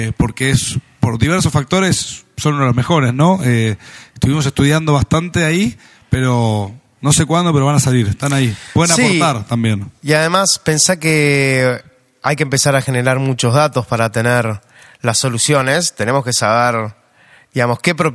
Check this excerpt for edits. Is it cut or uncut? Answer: uncut